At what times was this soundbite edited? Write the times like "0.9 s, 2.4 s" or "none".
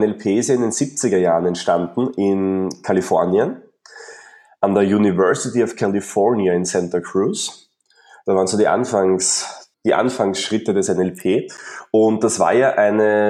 9.7 s